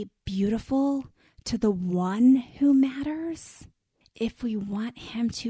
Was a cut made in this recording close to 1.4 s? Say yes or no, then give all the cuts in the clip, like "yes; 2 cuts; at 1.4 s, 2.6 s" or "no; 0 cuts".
no; 1 cut; at 4.0 s